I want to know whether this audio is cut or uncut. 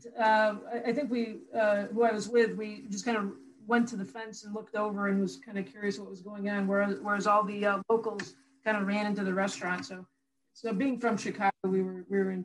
uncut